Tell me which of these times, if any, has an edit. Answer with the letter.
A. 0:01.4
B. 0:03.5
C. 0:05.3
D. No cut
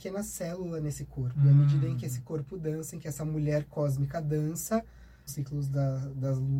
C